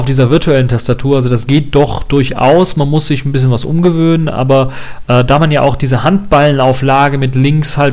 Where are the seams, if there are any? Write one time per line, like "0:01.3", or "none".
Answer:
none